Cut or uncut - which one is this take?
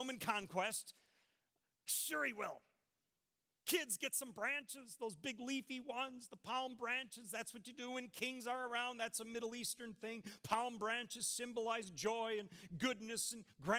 uncut